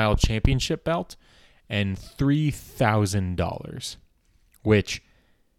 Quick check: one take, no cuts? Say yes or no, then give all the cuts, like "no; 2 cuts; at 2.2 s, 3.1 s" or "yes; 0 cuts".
yes; 0 cuts